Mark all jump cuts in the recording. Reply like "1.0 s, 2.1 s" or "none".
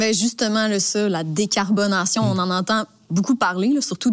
none